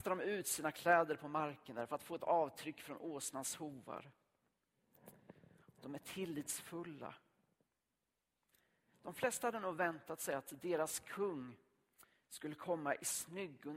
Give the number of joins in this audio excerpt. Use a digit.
1